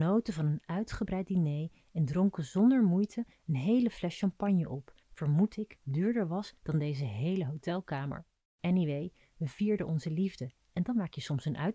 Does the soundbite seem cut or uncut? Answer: cut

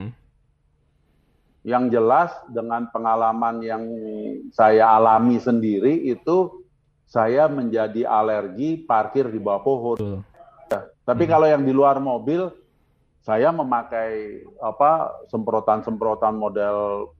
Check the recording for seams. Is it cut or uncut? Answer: uncut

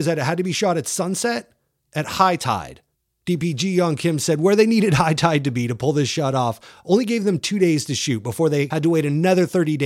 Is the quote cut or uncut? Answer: uncut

